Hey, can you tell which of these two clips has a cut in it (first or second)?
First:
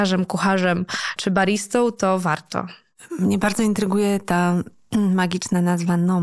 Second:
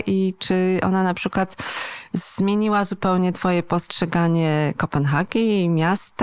first